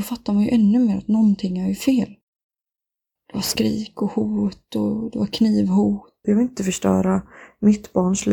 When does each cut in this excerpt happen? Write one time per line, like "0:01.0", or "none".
0:03.2
0:06.2